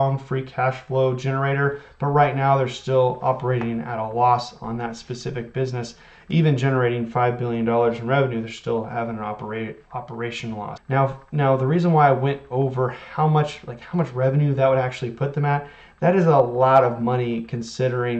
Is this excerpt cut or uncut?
cut